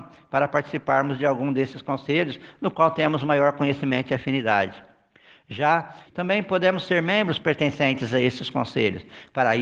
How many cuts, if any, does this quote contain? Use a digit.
1